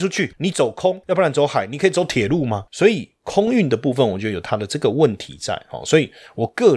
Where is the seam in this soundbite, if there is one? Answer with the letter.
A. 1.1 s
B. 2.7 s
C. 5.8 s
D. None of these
B